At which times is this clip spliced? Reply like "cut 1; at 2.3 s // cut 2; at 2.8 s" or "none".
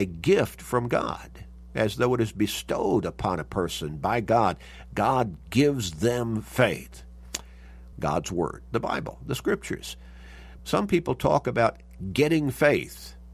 cut 1; at 7.9 s // cut 2; at 10.6 s

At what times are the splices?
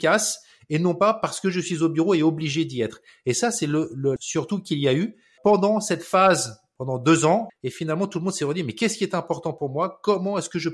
cut 1; at 4.2 s // cut 2; at 5.4 s // cut 3; at 7.5 s

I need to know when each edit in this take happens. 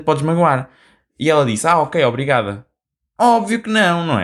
none

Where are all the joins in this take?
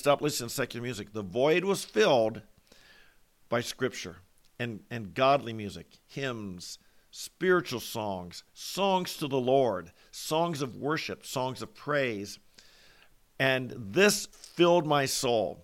none

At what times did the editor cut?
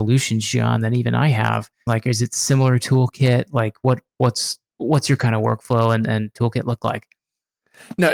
cut 1; at 1.9 s

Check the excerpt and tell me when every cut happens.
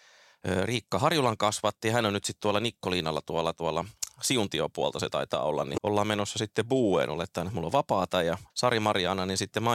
cut 1; at 5.8 s // cut 2; at 8.5 s

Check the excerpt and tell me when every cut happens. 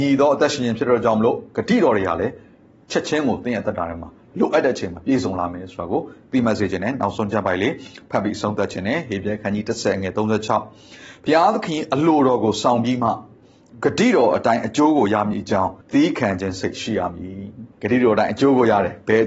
cut 1; at 15.8 s // cut 2; at 17.7 s

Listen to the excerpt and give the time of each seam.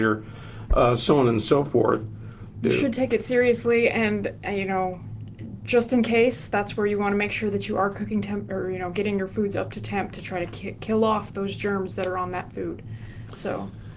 cut 1; at 2.6 s

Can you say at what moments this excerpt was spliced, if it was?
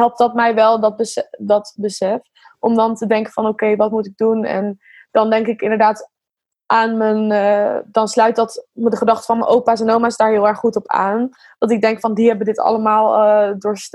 none

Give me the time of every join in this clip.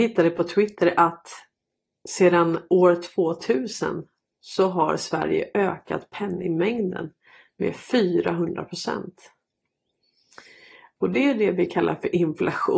none

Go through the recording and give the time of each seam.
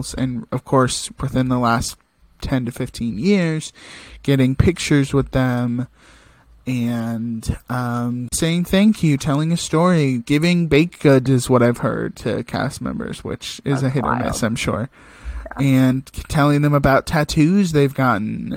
cut 1; at 8.3 s

